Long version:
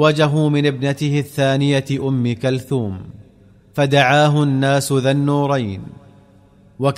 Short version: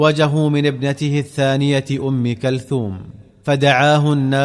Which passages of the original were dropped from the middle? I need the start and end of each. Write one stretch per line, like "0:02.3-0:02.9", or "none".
0:03.3-0:03.6